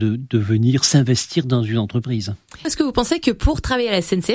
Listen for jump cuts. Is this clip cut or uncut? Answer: uncut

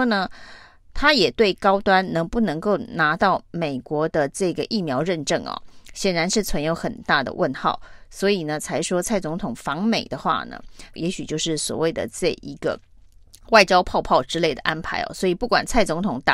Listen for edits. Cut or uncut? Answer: cut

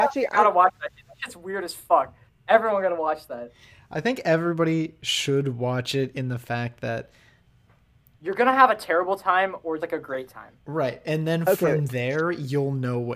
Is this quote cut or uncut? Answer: cut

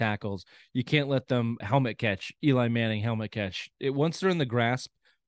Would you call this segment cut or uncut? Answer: cut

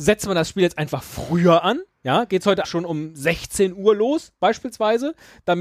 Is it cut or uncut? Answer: cut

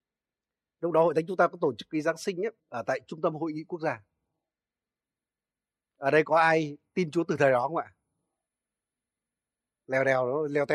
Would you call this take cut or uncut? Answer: cut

